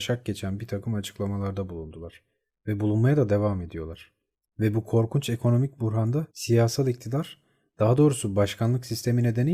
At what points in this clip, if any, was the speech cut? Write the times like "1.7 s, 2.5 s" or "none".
4.4 s, 6.3 s